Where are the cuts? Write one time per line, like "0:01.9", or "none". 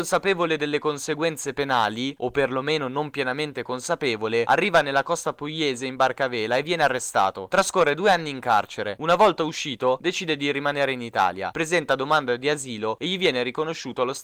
none

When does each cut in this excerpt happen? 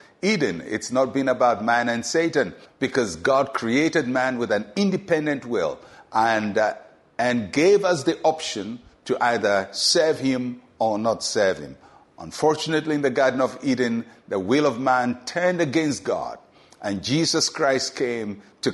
0:02.6

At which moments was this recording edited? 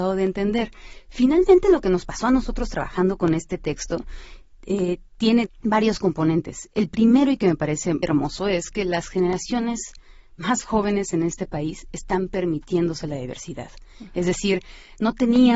0:05.5
0:08.0

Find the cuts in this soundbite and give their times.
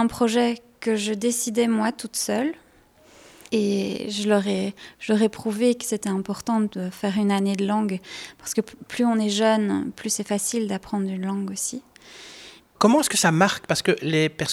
0:03.5
0:12.6

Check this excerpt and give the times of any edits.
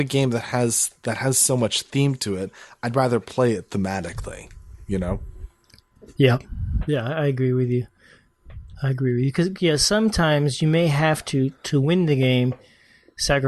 none

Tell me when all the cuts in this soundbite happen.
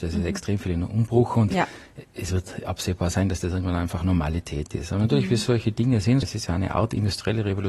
0:06.2

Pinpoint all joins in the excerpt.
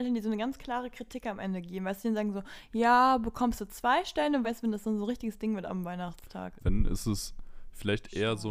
0:04.4
0:06.6

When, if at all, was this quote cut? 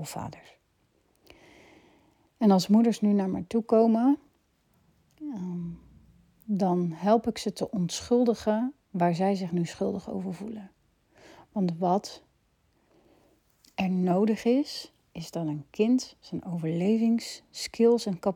none

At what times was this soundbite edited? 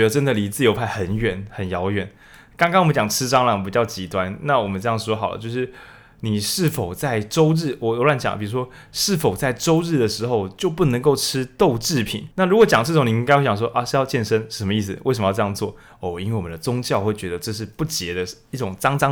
0:12.3

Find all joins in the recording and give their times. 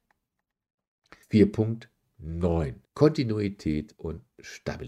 0:01.2
0:02.9

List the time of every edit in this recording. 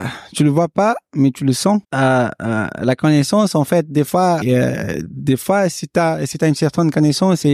0:01.8
0:04.4

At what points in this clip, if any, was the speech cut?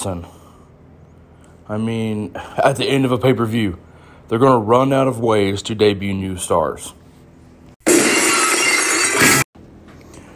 none

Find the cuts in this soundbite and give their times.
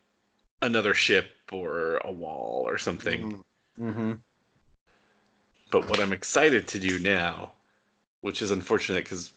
0:03.7

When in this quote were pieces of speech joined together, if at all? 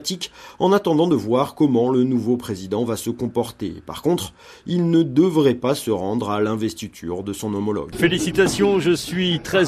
0:07.9

